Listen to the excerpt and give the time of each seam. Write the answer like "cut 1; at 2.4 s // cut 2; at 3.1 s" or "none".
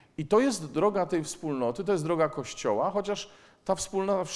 none